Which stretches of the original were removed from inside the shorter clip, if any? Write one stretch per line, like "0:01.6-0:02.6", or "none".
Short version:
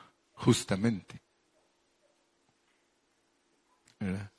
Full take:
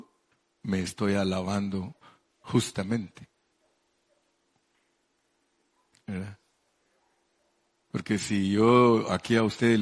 none